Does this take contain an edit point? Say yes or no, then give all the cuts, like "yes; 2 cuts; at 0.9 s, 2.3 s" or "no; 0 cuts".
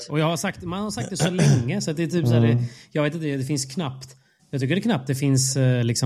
no; 0 cuts